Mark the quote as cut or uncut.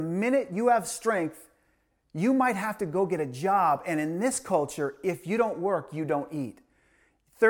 uncut